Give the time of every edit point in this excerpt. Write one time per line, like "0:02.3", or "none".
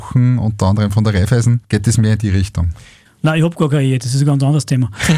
0:03.0